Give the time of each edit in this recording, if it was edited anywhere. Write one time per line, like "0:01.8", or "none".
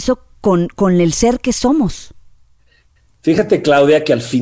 none